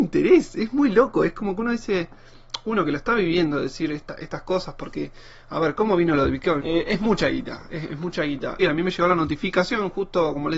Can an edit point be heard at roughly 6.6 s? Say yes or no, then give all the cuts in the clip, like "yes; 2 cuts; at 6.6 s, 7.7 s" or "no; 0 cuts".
yes; 2 cuts; at 6.6 s, 8.6 s